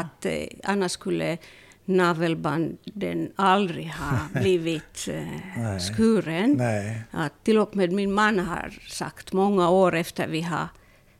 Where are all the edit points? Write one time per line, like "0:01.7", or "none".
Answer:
none